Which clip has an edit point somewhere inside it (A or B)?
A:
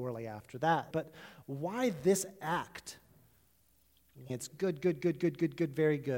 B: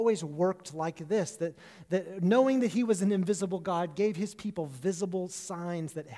A